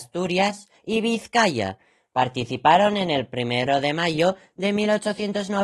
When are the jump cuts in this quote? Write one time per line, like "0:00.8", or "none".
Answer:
none